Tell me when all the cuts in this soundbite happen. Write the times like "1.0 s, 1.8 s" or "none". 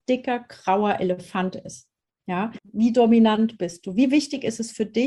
2.6 s